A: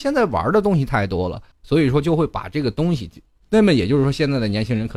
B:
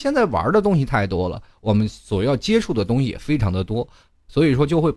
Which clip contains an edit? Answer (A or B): A